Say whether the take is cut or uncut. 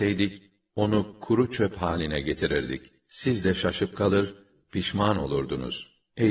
uncut